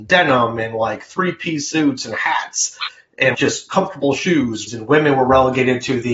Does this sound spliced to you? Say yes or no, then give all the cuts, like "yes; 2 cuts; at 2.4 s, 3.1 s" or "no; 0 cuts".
yes; 2 cuts; at 3.3 s, 4.7 s